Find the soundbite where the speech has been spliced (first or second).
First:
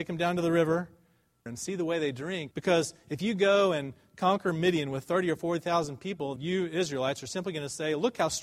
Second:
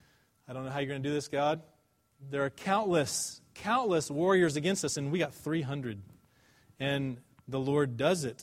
first